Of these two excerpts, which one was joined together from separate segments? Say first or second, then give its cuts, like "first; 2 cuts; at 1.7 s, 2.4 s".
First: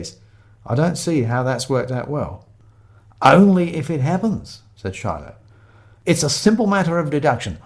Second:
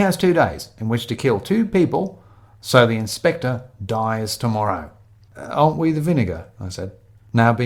second; 1 cut; at 5.3 s